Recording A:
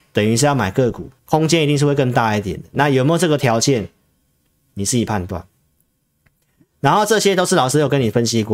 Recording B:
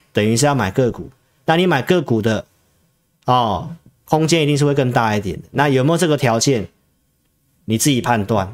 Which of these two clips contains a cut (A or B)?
A